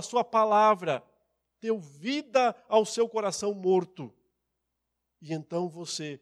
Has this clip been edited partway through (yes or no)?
no